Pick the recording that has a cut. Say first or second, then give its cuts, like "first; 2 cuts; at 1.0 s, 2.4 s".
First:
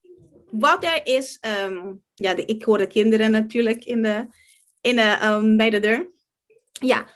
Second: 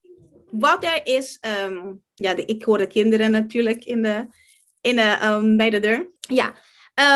second; 1 cut; at 6.2 s